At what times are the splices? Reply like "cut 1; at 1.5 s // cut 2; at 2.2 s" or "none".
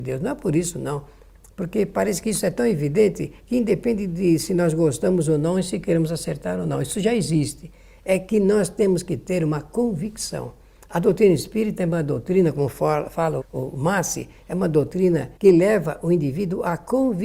cut 1; at 13.4 s // cut 2; at 15.4 s